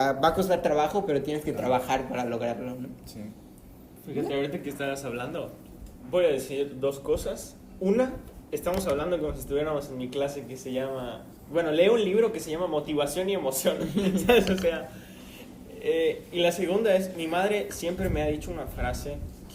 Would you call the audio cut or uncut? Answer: uncut